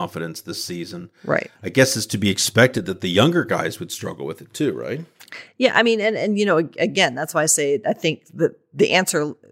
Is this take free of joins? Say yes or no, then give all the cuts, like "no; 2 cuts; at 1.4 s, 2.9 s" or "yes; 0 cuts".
yes; 0 cuts